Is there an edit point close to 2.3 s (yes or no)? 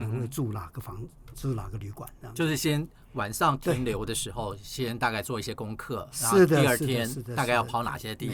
no